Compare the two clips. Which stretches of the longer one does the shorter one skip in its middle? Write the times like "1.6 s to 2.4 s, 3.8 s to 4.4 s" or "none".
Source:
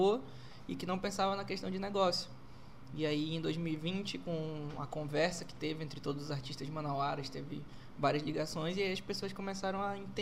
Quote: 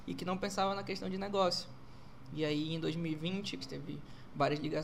4.2 s to 7.2 s